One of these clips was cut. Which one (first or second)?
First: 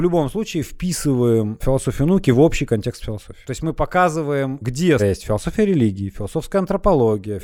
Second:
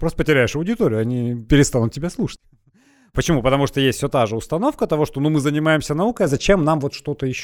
first